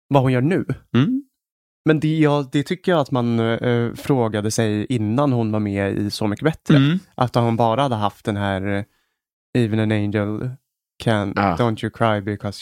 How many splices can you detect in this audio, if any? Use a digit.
0